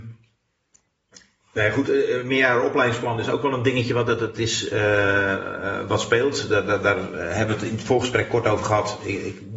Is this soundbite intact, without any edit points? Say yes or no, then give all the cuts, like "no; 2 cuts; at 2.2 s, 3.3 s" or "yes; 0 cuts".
yes; 0 cuts